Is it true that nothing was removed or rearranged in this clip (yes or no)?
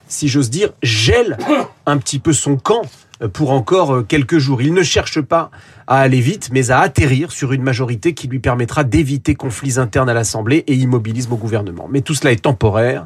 yes